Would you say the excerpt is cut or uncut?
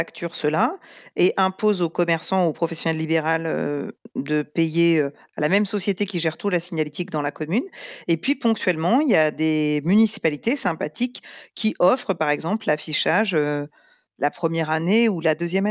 uncut